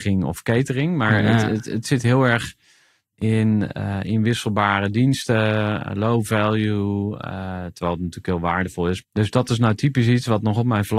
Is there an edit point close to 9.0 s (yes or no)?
yes